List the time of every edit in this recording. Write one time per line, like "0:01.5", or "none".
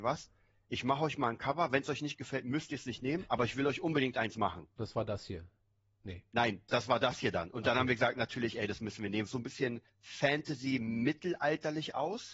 0:06.7
0:09.3